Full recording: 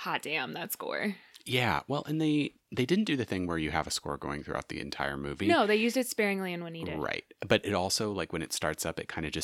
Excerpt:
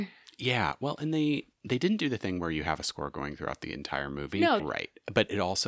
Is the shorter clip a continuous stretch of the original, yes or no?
no